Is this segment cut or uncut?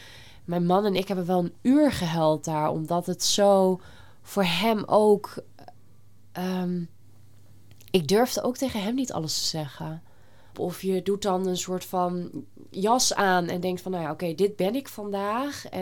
cut